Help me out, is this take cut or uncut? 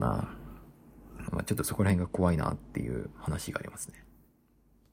cut